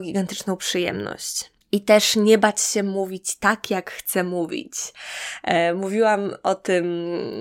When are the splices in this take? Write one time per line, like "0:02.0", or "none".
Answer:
0:01.6